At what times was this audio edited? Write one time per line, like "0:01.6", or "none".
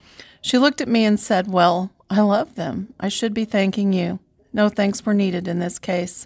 0:04.4